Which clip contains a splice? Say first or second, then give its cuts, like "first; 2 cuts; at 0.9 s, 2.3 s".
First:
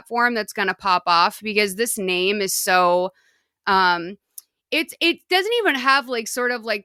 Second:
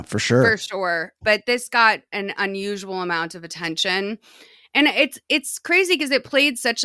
second; 1 cut; at 1.2 s